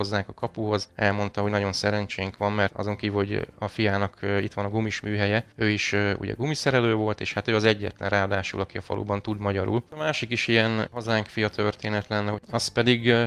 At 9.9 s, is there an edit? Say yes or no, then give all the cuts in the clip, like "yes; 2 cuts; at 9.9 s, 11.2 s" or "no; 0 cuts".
yes; 1 cut; at 9.9 s